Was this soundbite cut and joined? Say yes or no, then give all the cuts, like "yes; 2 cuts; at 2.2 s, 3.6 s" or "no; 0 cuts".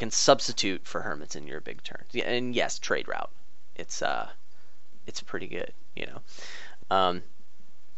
yes; 1 cut; at 6.8 s